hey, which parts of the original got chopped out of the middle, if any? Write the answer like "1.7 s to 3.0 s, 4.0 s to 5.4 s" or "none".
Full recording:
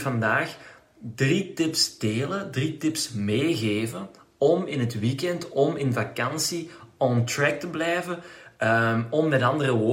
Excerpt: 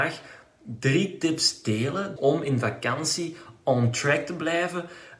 2.5 s to 5.5 s